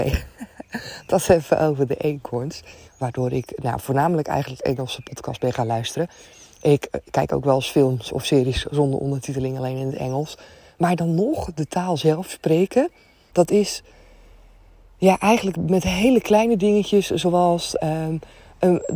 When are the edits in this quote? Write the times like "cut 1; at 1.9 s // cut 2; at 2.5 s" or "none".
cut 1; at 2.9 s // cut 2; at 13.3 s